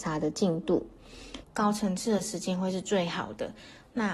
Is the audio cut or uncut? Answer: cut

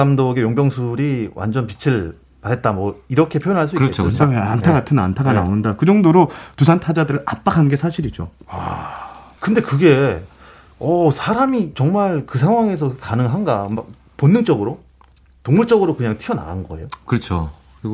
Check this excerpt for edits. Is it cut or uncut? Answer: cut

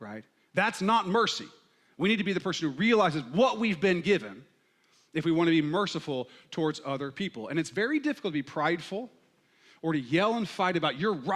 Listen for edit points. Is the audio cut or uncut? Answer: uncut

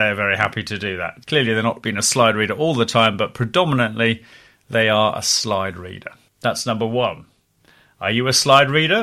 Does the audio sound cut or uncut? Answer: uncut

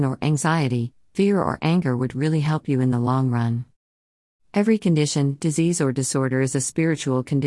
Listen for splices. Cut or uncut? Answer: uncut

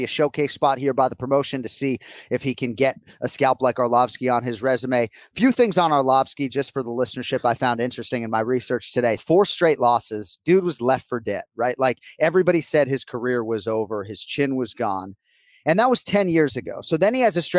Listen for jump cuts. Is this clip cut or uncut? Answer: cut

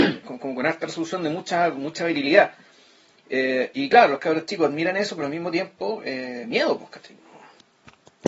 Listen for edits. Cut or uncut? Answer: uncut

